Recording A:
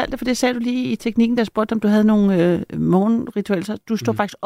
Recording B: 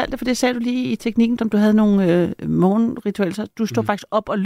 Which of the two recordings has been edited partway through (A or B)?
B